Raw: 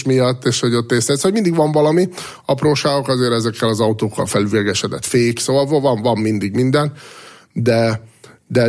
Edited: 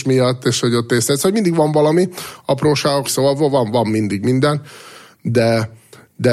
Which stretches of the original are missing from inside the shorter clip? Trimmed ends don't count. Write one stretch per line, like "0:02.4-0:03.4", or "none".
0:03.0-0:05.3